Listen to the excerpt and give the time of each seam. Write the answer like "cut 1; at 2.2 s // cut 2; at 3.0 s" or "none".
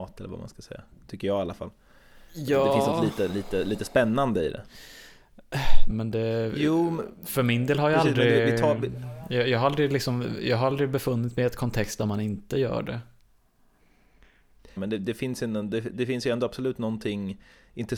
cut 1; at 5.9 s // cut 2; at 14.8 s